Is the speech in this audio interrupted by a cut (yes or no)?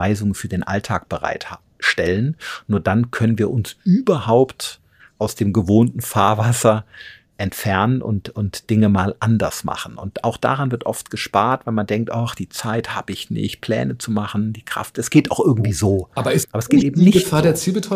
no